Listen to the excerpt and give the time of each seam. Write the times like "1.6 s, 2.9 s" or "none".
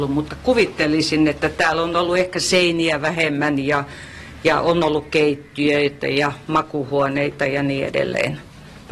none

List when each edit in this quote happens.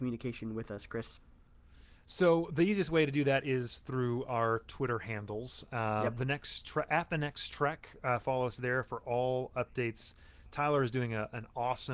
none

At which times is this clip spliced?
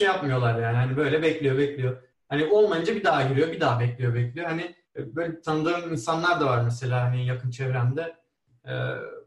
4.8 s

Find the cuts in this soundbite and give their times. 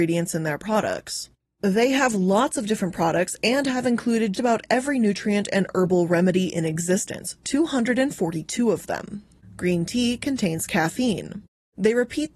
4.3 s, 9.4 s

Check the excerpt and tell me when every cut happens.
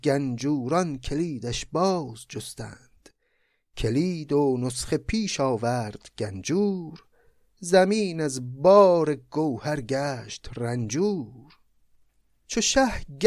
none

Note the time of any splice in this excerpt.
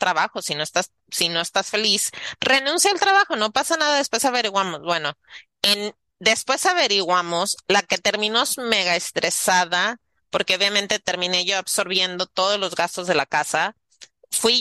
none

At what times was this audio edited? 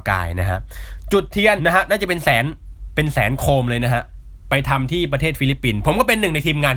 1.6 s

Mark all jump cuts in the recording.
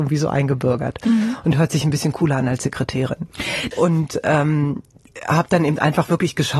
3.7 s

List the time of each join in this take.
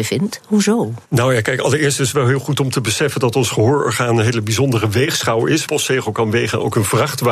1.0 s, 5.7 s

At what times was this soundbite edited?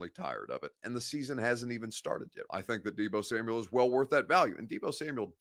2.5 s

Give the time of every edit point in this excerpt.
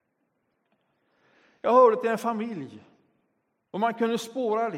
none

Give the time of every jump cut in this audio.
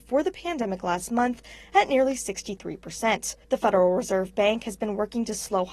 3.4 s

